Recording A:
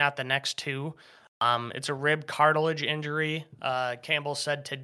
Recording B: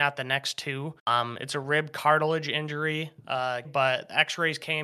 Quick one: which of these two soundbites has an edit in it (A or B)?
B